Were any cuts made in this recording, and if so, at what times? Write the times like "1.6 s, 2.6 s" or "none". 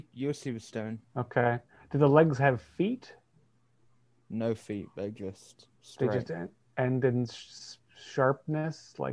1.0 s, 5.8 s